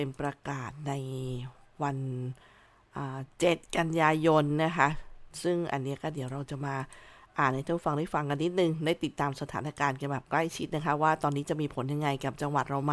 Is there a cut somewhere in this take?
no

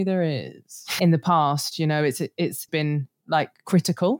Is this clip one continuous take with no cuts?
no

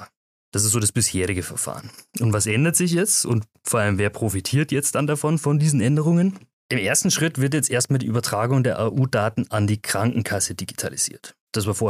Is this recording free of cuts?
yes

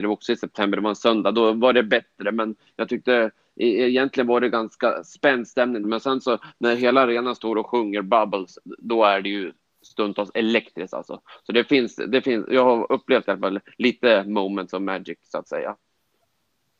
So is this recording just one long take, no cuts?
no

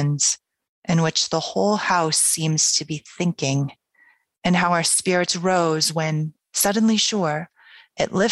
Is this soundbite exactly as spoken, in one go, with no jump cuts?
no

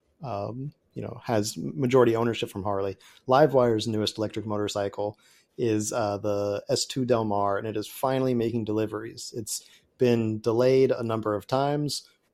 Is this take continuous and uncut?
yes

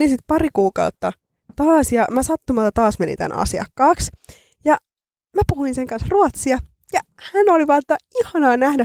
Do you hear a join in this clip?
no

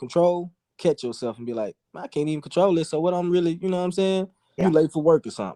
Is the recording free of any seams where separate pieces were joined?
no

